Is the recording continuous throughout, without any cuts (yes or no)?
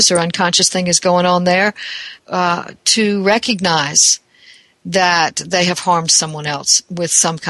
no